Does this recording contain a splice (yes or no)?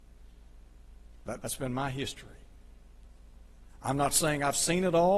yes